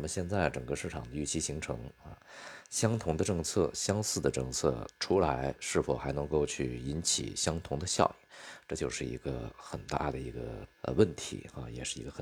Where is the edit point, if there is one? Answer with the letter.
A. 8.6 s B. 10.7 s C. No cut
B